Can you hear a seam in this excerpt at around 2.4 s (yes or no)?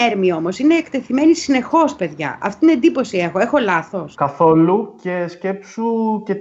no